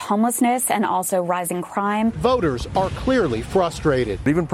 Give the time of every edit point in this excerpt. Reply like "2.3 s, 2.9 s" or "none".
none